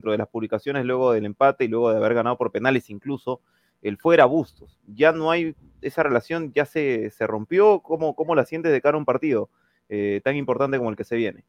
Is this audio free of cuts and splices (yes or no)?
yes